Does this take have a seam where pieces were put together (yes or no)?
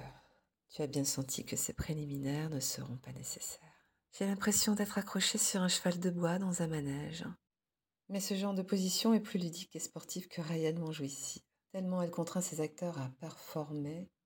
yes